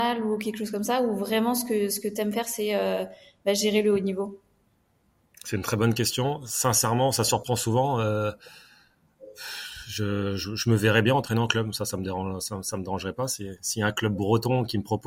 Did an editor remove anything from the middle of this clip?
no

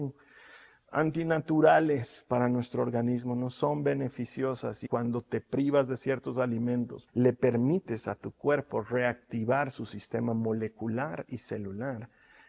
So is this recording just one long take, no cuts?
no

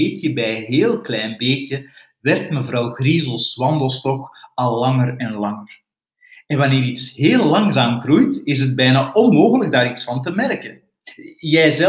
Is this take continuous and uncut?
yes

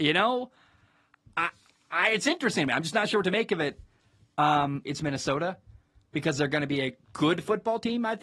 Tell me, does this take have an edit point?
yes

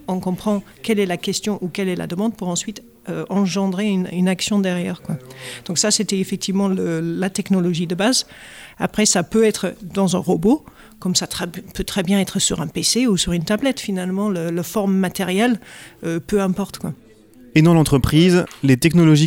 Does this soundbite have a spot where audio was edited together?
no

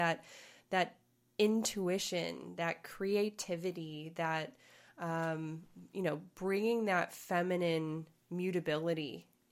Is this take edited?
no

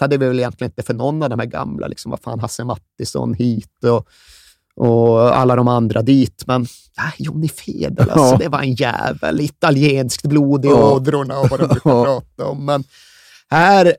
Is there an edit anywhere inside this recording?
no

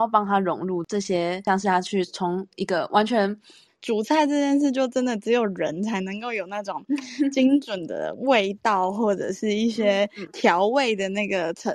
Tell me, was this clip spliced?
yes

